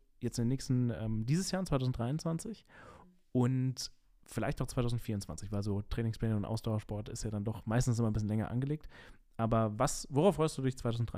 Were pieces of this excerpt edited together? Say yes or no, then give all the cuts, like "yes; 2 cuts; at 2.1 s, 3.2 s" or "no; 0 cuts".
no; 0 cuts